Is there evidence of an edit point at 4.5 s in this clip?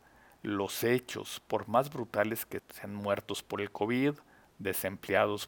no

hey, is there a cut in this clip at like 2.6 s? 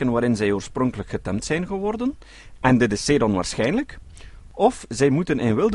yes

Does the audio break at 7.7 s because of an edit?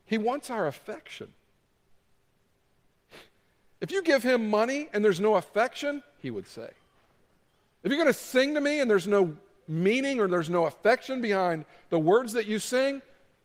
no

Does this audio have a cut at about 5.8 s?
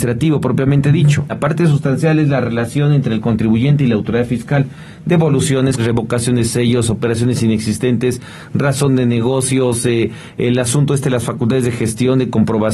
yes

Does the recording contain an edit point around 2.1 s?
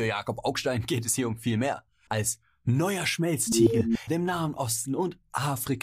yes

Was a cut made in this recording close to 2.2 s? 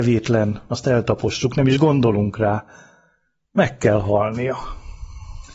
no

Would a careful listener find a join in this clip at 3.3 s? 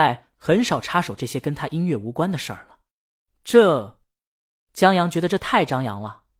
yes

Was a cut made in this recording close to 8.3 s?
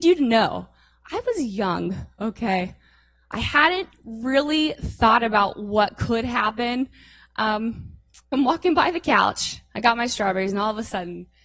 yes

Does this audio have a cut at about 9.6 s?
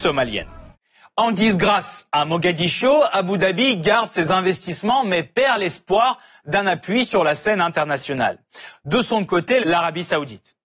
yes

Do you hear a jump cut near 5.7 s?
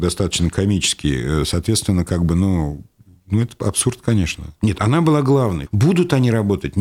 yes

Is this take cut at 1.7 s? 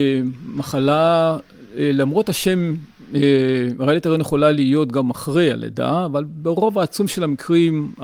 no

